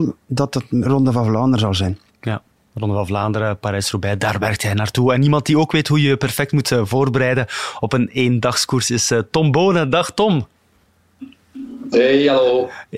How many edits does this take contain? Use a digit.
0